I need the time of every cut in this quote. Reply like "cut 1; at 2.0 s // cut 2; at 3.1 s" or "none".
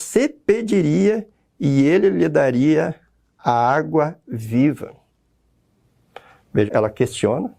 cut 1; at 6.7 s